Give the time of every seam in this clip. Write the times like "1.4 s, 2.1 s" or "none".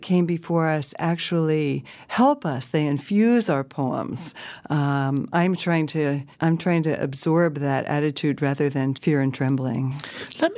6.3 s, 8.9 s